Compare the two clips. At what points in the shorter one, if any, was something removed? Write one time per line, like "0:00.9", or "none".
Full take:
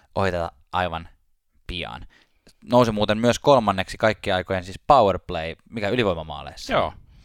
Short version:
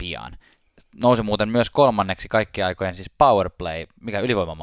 none